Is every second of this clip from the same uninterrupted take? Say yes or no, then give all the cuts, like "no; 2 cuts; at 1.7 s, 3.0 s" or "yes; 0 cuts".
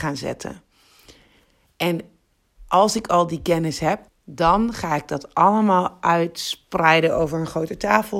no; 1 cut; at 4.1 s